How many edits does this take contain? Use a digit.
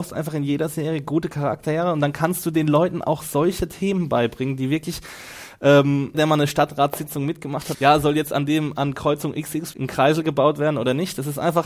3